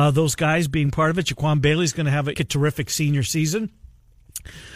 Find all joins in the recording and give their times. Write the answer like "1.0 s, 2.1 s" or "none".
2.3 s